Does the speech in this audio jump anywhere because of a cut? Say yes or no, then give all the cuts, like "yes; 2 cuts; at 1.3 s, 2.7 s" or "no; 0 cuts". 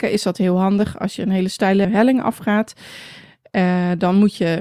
yes; 1 cut; at 1.8 s